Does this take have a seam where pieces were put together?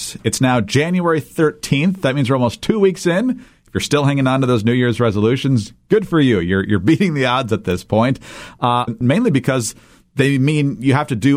yes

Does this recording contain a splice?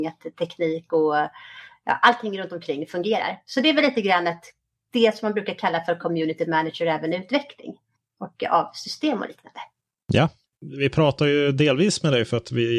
no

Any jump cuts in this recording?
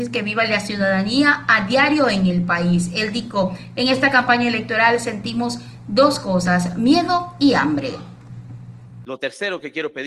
no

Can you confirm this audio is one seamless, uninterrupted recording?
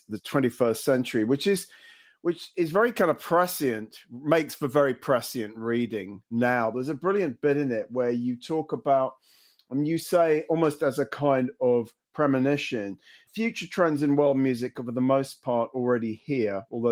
yes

